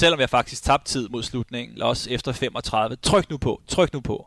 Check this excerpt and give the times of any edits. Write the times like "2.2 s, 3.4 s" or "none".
1.8 s